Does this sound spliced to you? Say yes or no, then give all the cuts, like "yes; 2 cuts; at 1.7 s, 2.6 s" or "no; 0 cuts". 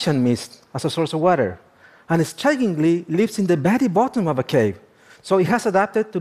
no; 0 cuts